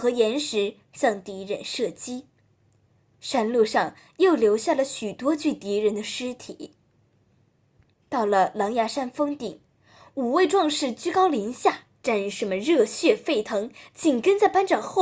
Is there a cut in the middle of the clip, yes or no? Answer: yes